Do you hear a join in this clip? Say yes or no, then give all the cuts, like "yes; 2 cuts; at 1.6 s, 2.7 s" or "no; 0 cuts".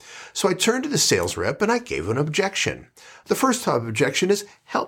yes; 1 cut; at 3.2 s